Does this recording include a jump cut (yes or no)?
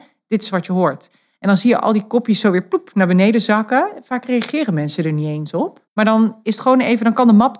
yes